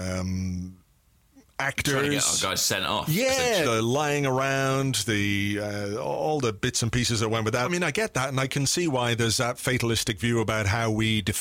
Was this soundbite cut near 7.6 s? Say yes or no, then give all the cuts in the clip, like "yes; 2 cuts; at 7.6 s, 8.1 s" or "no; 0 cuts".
yes; 2 cuts; at 3.6 s, 7.6 s